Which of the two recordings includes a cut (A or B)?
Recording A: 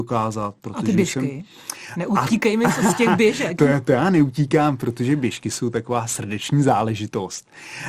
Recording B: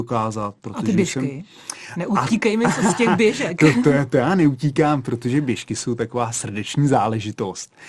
A